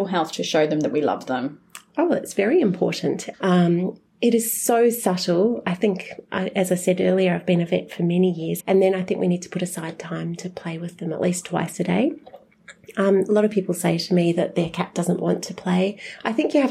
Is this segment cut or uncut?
cut